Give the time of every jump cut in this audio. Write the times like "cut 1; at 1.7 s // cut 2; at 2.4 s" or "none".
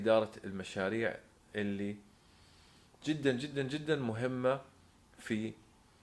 none